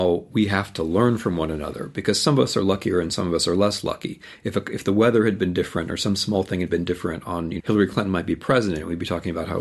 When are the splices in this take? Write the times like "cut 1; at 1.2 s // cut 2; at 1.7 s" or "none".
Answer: cut 1; at 7.6 s